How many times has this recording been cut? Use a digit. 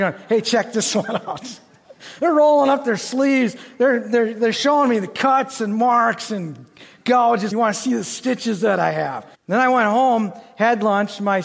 2